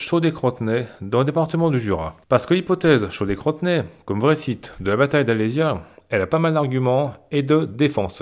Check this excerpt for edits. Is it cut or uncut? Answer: uncut